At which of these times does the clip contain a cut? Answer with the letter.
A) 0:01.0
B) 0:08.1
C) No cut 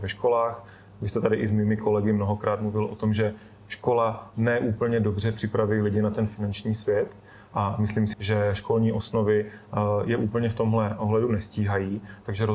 B